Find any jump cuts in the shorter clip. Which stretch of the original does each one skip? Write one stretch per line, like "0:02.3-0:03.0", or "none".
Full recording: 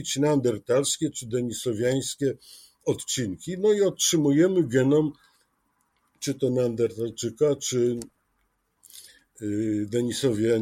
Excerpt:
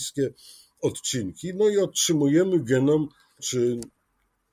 0:05.4-0:07.6